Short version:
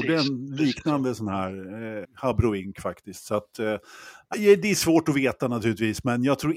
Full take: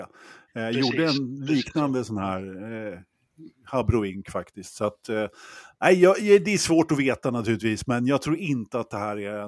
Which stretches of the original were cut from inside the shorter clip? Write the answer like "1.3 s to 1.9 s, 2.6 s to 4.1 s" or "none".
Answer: 2.9 s to 3.5 s, 5.8 s to 6.2 s